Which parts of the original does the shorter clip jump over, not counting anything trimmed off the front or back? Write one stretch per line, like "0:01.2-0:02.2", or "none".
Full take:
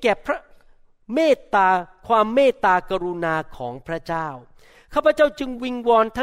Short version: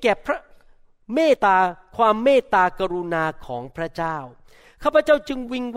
0:01.4-0:01.5